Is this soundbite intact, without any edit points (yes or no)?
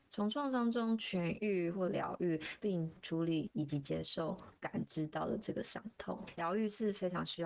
no